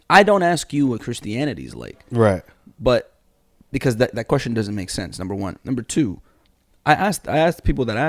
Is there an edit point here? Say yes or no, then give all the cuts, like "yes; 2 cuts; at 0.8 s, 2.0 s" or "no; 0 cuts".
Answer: no; 0 cuts